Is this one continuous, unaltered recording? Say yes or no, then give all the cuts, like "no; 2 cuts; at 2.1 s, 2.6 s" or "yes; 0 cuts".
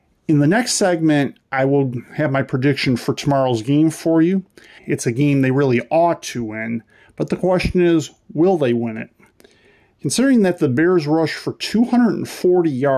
no; 1 cut; at 4.8 s